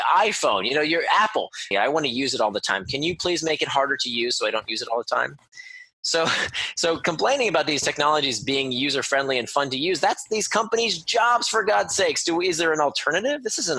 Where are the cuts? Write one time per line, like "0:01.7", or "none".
0:01.7

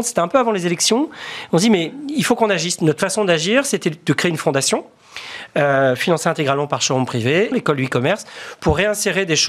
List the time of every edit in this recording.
0:07.5

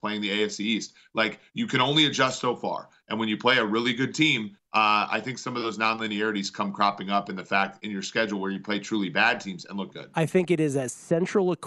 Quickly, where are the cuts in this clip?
0:09.9

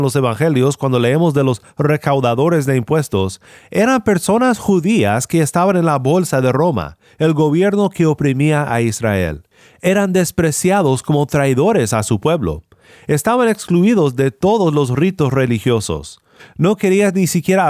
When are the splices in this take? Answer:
0:16.4

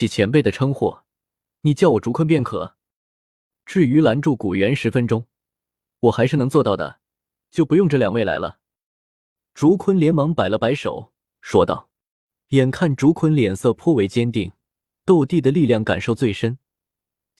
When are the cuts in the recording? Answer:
0:15.0

